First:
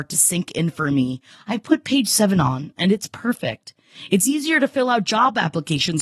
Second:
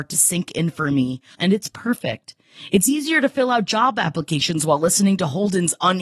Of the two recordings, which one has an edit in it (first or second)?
second